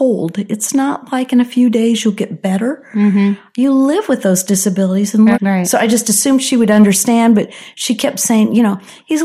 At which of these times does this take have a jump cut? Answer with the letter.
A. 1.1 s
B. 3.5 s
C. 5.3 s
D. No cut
C